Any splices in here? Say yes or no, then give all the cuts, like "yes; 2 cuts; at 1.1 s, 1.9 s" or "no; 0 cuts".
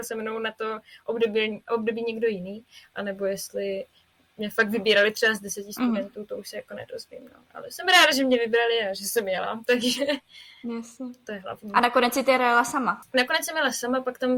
no; 0 cuts